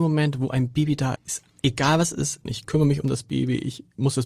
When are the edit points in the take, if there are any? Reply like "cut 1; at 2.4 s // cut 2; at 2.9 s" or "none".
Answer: cut 1; at 1.2 s // cut 2; at 2.5 s